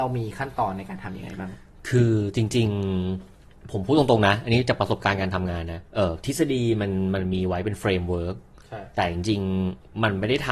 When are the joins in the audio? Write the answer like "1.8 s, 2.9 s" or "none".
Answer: 5.9 s